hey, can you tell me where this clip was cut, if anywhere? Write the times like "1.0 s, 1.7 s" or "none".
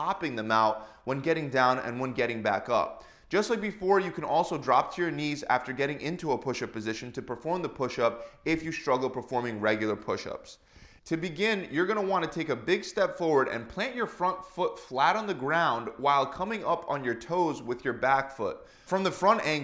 11.0 s